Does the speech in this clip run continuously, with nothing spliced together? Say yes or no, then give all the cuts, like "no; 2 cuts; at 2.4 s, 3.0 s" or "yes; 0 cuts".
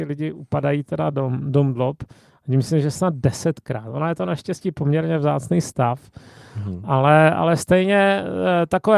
yes; 0 cuts